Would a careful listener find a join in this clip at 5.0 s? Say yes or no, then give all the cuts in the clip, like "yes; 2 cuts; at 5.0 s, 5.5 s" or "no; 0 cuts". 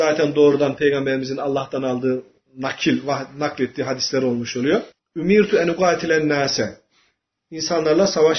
yes; 1 cut; at 5.0 s